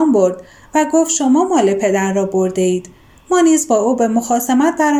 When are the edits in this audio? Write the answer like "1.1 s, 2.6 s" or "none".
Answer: none